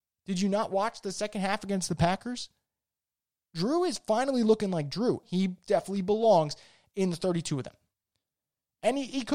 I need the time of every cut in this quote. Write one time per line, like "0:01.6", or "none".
0:05.2